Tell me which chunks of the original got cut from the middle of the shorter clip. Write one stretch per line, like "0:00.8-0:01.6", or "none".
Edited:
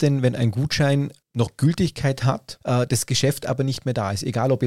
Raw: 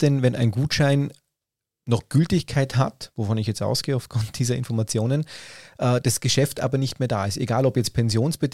0:01.2-0:01.7
0:03.1-0:05.7